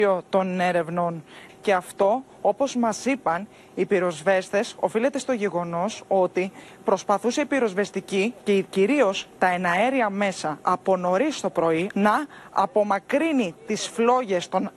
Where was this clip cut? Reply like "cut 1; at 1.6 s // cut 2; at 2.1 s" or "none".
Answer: cut 1; at 1.5 s // cut 2; at 11.9 s